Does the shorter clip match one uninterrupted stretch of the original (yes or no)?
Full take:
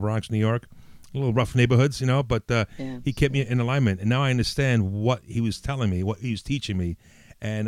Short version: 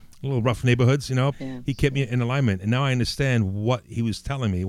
no